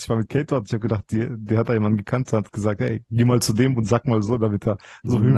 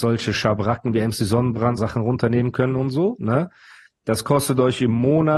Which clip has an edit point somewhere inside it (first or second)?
second